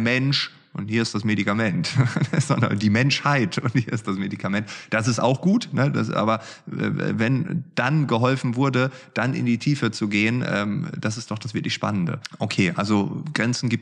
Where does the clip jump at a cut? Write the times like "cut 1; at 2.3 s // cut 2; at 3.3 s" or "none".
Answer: none